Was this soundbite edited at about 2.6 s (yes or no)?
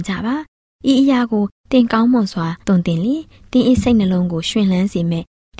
yes